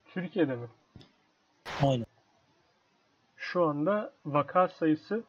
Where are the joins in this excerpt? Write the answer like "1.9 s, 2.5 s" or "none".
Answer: 4.2 s